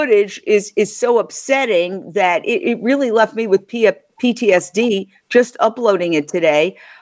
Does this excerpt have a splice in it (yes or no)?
no